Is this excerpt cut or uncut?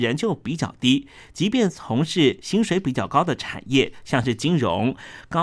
uncut